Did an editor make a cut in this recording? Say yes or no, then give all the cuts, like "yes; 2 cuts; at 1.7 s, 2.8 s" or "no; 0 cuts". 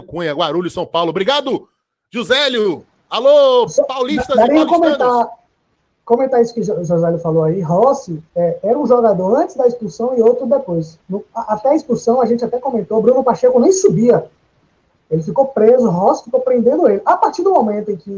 no; 0 cuts